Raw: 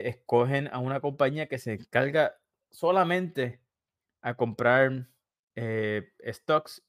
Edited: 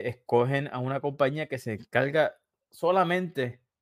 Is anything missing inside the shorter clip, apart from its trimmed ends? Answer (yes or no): no